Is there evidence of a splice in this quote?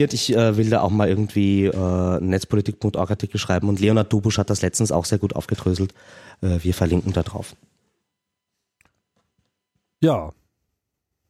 no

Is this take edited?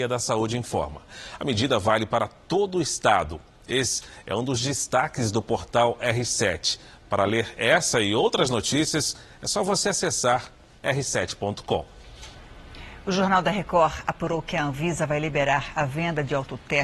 no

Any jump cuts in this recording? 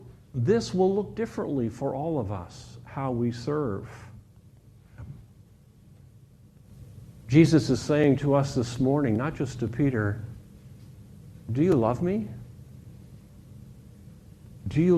no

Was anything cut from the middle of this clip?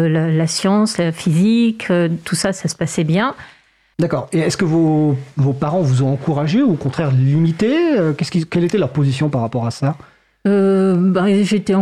yes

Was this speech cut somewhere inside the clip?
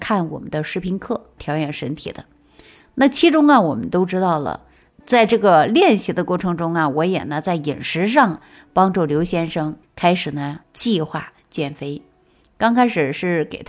yes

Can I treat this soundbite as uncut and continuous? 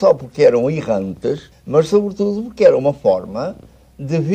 no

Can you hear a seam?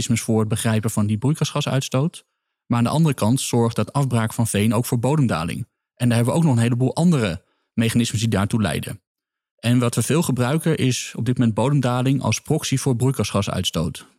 no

